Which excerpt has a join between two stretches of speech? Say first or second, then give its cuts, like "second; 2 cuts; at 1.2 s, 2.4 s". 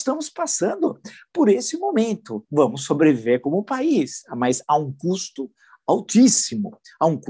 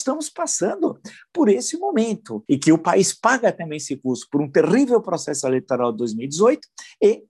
second; 1 cut; at 2.5 s